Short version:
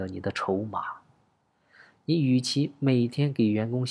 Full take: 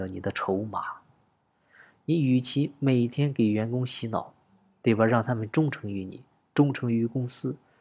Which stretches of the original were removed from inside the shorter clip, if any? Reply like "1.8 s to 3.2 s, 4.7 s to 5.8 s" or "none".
none